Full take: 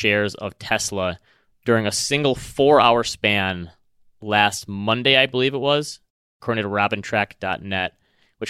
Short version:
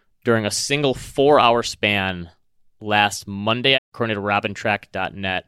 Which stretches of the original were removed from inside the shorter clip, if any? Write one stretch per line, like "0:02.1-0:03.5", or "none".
0:05.2-0:06.2

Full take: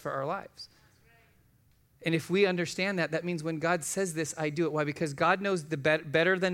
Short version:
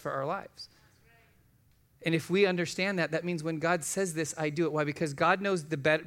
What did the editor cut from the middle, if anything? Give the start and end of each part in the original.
none

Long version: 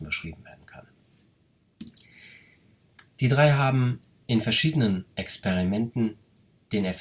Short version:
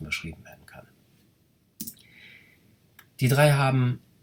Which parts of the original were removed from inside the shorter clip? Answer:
none

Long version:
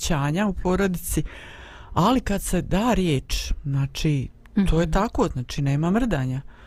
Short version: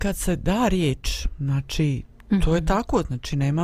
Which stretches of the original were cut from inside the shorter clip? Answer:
none

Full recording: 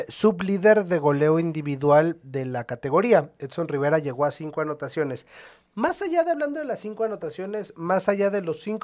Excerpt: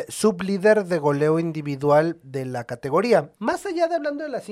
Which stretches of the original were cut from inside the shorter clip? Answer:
0:03.3-0:05.7

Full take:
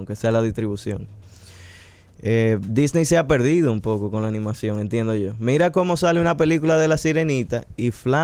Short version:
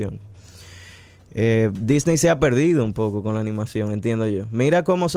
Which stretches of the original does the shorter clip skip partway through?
none

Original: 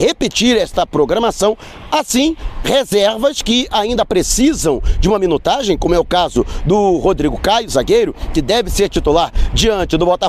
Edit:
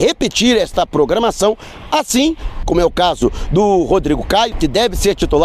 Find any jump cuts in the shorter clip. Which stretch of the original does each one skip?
0:02.6-0:05.8
0:07.7-0:08.3

